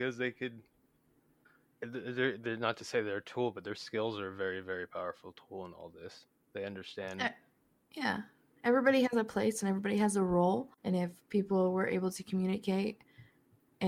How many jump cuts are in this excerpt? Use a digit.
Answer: 1